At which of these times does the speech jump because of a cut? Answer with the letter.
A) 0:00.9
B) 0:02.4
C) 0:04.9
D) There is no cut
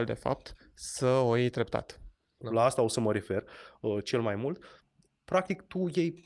B